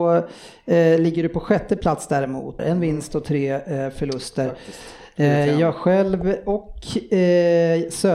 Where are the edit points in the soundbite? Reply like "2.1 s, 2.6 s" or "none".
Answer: 2.6 s